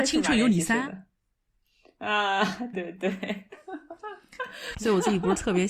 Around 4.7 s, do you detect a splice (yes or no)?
yes